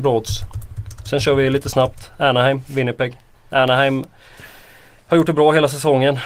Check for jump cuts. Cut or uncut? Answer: uncut